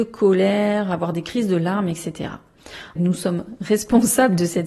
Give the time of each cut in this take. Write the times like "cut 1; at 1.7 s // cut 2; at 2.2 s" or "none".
cut 1; at 3.0 s

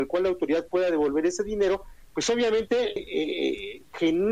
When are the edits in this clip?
cut 1; at 3.0 s

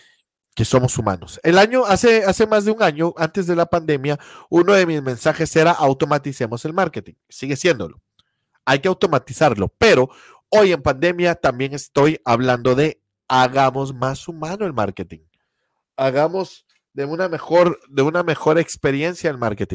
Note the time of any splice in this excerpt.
none

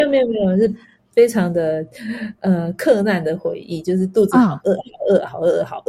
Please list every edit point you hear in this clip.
none

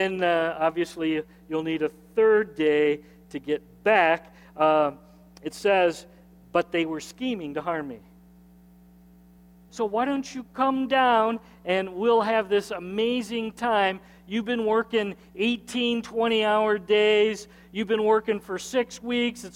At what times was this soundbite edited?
cut 1; at 9.7 s

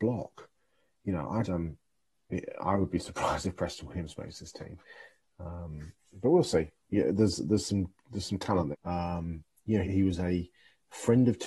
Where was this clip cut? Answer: cut 1; at 1.4 s // cut 2; at 8.7 s // cut 3; at 9.8 s

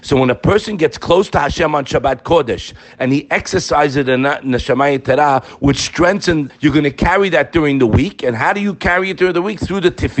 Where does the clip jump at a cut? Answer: cut 1; at 6.5 s

